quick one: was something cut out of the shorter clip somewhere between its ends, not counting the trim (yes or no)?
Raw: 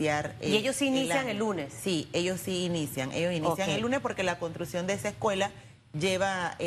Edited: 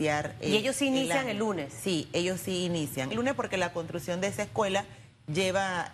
yes